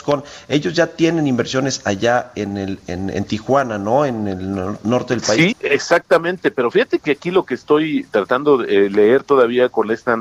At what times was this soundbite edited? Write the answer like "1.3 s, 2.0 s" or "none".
5.5 s